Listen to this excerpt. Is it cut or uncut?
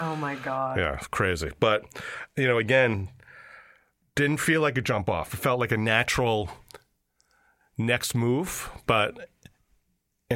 uncut